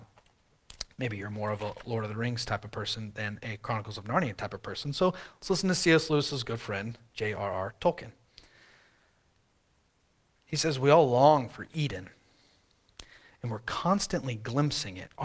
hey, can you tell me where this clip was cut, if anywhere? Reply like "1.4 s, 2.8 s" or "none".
none